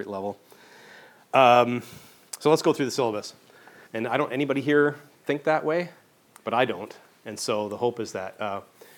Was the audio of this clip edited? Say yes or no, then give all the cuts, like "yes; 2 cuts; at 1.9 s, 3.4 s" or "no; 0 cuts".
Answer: yes; 2 cuts; at 3.8 s, 6.3 s